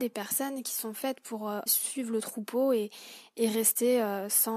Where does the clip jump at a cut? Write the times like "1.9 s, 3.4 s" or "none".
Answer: 1.7 s

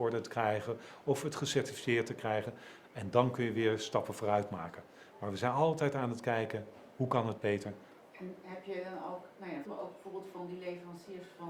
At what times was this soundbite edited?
8.0 s, 9.6 s

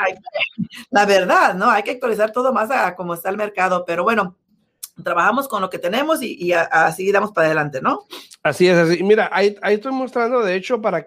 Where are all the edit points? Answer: none

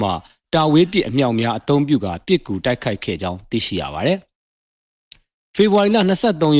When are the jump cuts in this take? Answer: none

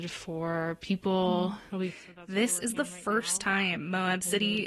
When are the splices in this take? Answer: 1.7 s

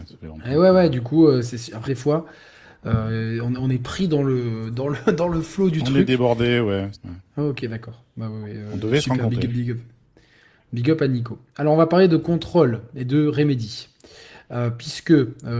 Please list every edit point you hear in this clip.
1.9 s, 6.9 s

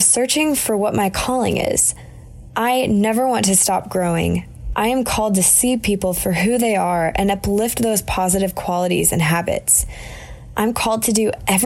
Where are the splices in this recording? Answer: 2.5 s, 4.7 s

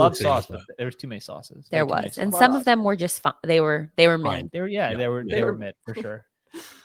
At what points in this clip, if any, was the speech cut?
none

